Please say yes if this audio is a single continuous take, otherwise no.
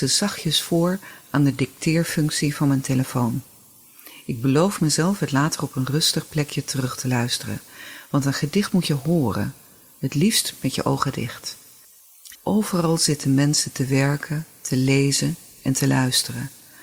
no